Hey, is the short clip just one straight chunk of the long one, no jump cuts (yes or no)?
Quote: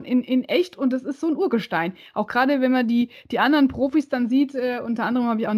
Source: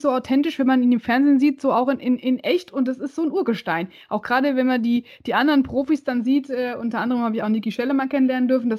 yes